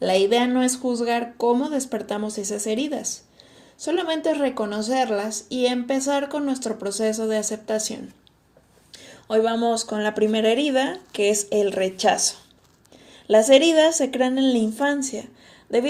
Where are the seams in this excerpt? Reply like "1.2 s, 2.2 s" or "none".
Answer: none